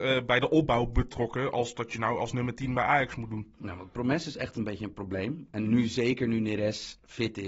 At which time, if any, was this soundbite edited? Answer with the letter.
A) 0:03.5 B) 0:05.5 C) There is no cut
C